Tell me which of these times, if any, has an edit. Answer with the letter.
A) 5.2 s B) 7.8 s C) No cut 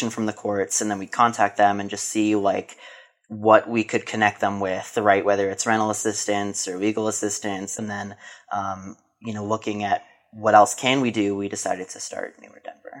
B